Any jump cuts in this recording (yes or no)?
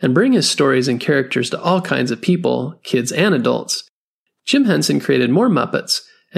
no